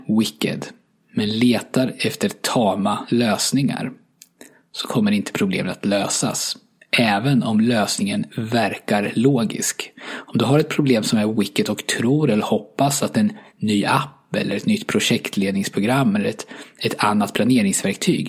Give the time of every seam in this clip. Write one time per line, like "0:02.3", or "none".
none